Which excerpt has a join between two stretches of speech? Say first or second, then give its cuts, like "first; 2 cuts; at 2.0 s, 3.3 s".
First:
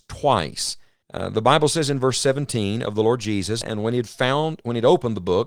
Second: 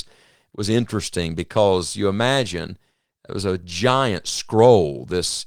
first; 2 cuts; at 1.0 s, 3.6 s